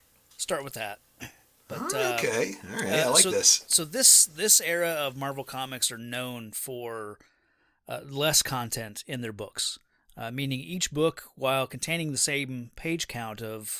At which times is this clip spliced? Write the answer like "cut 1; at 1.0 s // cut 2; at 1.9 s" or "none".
none